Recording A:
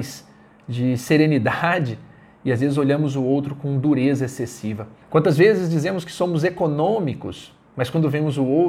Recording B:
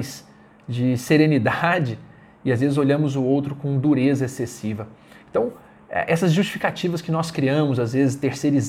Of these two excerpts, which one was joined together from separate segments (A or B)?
A